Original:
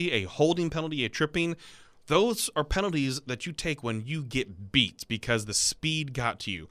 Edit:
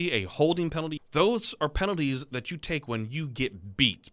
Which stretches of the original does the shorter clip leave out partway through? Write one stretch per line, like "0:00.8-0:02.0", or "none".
0:01.0-0:01.9